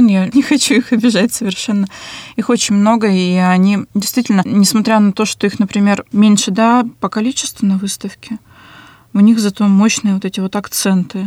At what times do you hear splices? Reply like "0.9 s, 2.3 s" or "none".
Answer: none